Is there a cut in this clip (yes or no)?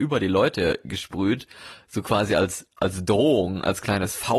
no